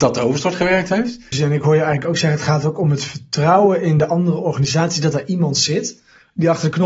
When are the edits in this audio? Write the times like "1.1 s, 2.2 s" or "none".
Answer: 1.3 s